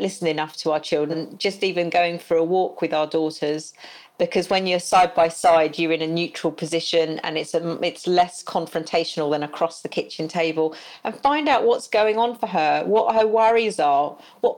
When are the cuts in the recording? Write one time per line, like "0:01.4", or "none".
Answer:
0:01.1